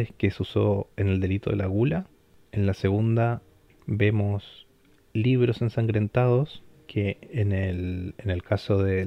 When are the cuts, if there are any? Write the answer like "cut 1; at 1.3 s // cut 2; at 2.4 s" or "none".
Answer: none

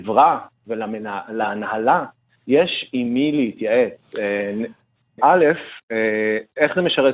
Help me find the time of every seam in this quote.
cut 1; at 5.2 s

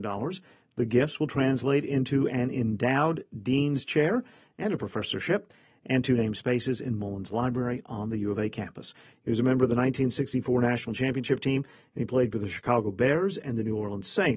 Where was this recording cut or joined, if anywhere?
cut 1; at 9.1 s

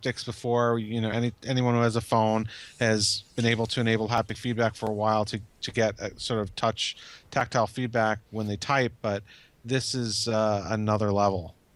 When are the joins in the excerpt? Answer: none

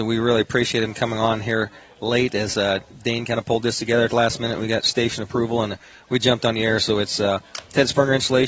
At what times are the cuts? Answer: none

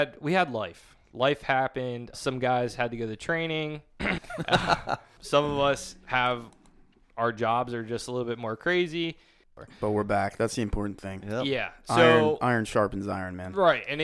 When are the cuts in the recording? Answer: cut 1; at 4.2 s

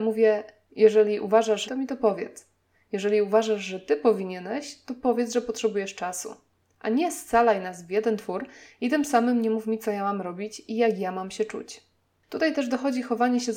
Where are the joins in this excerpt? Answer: cut 1; at 1.7 s

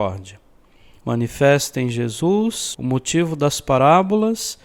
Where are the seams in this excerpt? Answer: cut 1; at 1.0 s // cut 2; at 2.7 s

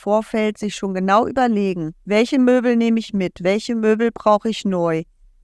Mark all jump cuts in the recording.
cut 1; at 2.0 s

